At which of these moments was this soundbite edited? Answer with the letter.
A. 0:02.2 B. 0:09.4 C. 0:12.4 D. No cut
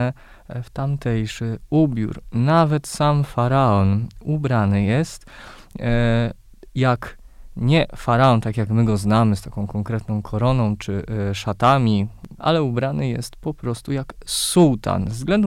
C